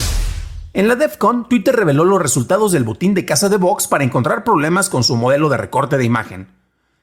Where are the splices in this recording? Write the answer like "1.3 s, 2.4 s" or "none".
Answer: none